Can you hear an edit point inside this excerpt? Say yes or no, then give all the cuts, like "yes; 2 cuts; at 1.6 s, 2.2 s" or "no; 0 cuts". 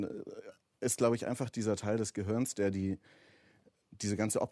no; 0 cuts